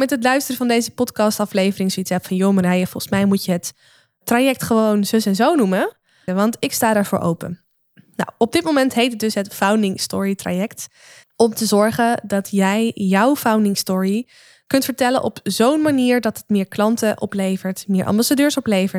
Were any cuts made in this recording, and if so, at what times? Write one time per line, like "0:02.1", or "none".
0:06.3
0:11.2